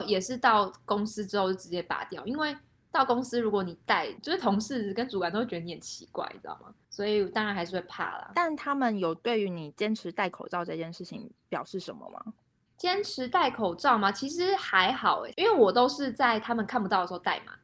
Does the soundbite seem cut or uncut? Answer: uncut